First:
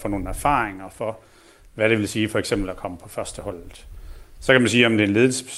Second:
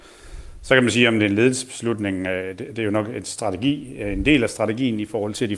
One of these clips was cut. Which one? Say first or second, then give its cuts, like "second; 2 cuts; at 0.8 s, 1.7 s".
first; 1 cut; at 4.4 s